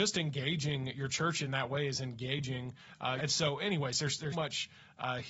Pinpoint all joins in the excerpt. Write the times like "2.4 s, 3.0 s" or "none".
3.2 s, 4.3 s